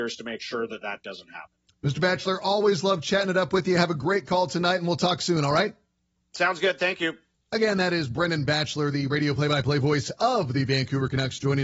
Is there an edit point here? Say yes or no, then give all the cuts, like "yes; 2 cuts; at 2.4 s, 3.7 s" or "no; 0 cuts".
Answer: no; 0 cuts